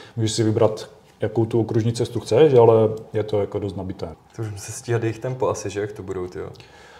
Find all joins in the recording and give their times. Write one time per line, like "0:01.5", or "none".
0:04.1